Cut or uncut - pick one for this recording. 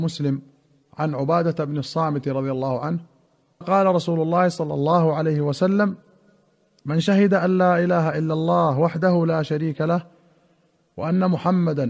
cut